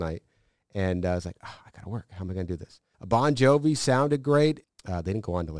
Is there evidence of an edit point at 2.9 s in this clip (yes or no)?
yes